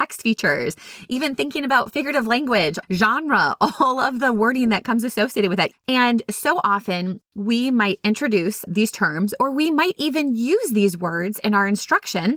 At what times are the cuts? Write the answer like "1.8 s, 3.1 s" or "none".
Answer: 2.8 s, 5.7 s, 8.7 s